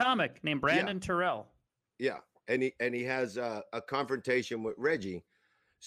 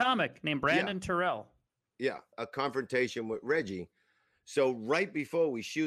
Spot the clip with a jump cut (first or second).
second